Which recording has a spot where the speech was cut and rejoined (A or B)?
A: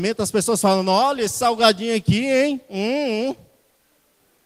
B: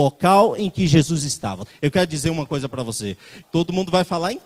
B